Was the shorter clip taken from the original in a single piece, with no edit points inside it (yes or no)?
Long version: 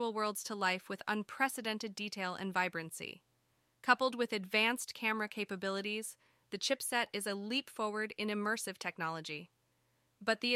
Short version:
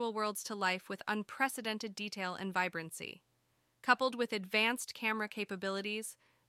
yes